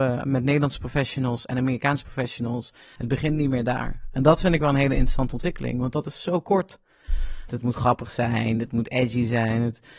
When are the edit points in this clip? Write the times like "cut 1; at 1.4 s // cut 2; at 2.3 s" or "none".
cut 1; at 3.0 s // cut 2; at 7.5 s